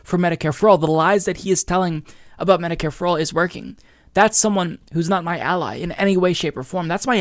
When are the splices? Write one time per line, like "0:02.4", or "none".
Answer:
none